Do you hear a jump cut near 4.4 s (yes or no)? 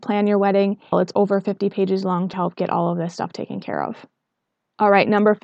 no